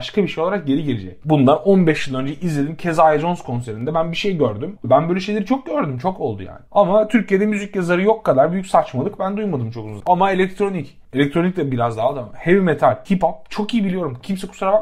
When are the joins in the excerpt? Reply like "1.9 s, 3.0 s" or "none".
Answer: 4.8 s, 10.0 s